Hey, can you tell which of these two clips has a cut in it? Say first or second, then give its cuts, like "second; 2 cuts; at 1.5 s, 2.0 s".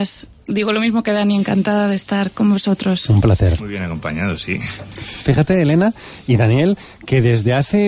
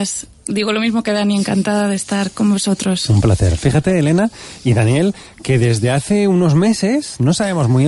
first; 2 cuts; at 3.6 s, 5.2 s